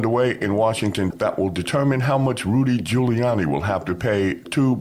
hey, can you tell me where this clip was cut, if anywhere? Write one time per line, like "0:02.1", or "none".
0:01.1